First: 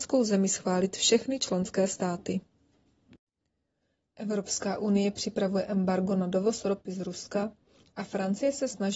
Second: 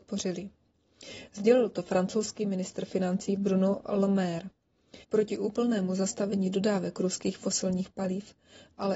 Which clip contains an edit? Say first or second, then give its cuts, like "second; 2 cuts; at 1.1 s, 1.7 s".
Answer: second; 1 cut; at 5.0 s